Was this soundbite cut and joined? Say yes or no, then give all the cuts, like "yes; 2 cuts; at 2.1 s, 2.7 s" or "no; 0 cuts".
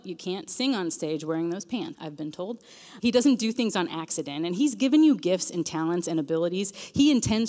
yes; 2 cuts; at 1.9 s, 3.0 s